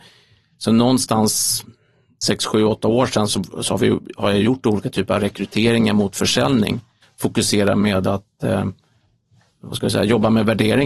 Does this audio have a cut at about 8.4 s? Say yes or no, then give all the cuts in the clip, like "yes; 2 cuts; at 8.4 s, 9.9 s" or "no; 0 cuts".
no; 2 cuts; at 3.3 s, 7.0 s